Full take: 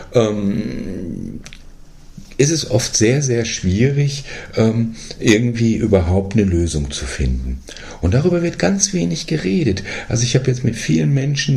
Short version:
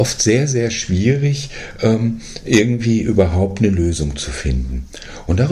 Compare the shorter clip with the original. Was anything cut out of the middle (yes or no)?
no